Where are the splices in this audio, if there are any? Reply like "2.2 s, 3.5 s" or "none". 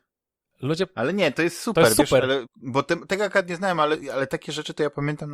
2.5 s

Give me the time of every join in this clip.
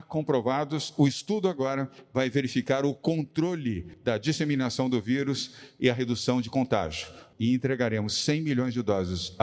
7.3 s

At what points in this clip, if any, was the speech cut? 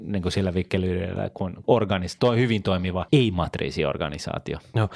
3.1 s

